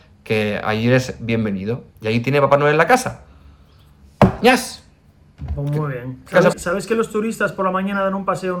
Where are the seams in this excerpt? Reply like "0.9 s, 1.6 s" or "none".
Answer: 6.5 s